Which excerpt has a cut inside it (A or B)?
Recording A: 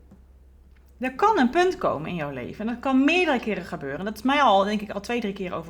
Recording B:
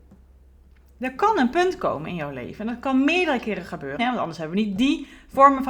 B